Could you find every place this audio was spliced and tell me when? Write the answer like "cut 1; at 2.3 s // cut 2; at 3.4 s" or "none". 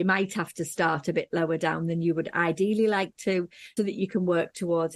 cut 1; at 3.8 s